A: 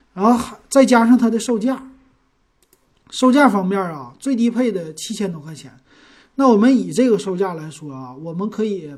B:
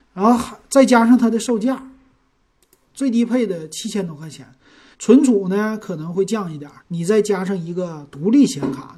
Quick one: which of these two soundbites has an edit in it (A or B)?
B